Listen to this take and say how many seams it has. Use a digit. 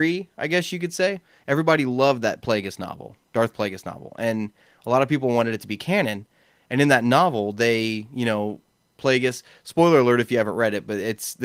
1